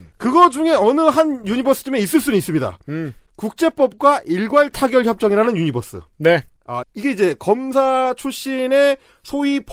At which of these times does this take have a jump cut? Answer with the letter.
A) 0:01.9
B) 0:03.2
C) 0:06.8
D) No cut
C